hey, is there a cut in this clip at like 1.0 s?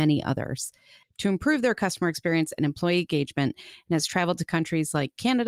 yes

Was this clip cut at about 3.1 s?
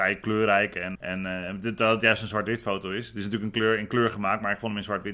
no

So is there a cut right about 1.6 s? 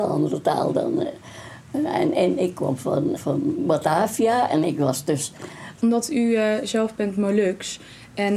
no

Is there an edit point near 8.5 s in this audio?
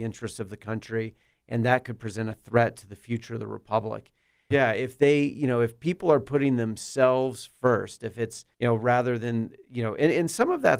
yes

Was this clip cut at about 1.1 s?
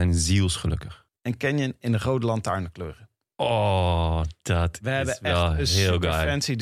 yes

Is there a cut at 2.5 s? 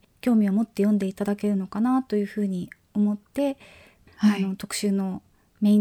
no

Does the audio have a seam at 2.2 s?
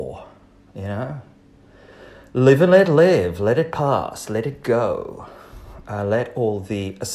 no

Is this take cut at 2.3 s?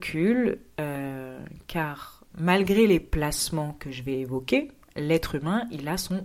yes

